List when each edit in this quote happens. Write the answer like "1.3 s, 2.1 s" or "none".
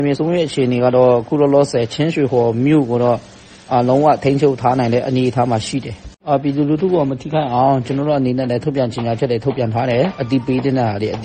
none